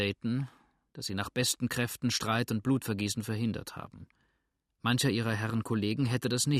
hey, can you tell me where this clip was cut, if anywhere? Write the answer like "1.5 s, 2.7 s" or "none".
none